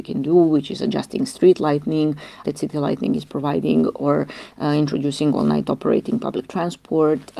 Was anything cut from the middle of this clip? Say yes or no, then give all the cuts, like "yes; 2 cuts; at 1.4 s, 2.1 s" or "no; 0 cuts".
yes; 1 cut; at 2.4 s